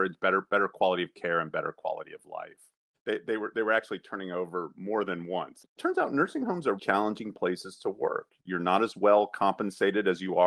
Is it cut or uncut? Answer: cut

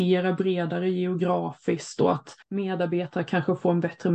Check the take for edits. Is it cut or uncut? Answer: cut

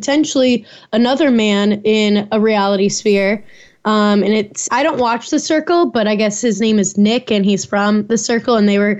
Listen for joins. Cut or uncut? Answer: cut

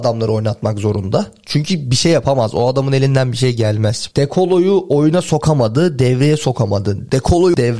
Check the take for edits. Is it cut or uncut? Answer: uncut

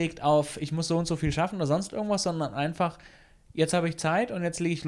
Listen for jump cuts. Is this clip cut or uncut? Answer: uncut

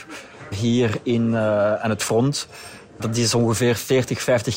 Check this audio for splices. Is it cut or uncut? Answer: uncut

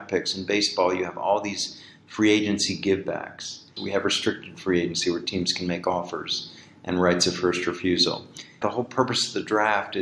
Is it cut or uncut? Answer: cut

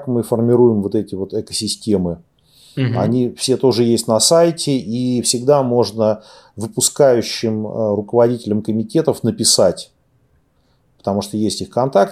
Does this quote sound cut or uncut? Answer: uncut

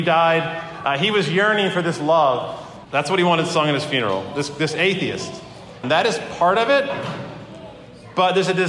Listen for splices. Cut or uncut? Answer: cut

